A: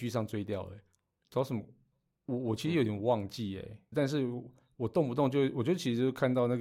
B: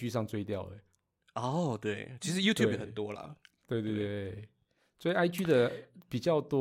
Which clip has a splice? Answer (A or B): A